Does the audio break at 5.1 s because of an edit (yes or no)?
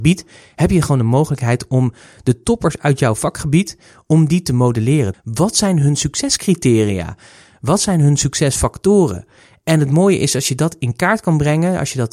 yes